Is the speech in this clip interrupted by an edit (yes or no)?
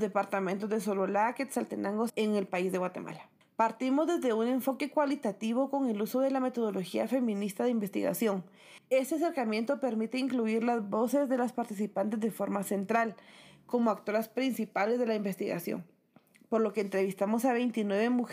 yes